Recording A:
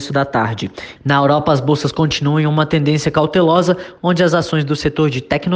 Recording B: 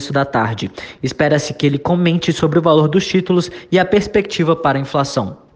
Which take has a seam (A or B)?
A